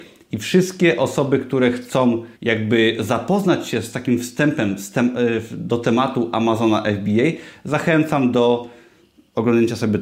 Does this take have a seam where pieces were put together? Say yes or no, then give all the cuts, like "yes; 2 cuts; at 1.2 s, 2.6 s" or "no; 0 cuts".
yes; 1 cut; at 2.4 s